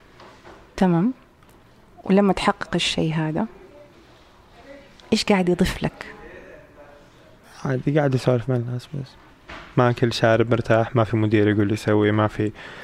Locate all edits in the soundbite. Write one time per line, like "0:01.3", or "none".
none